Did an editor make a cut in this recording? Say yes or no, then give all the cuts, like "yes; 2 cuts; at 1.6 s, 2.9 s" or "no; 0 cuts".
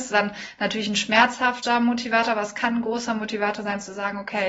no; 0 cuts